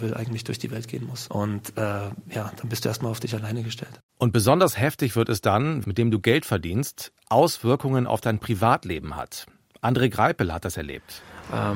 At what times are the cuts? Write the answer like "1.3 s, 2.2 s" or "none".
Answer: 1.3 s, 4.1 s, 5.8 s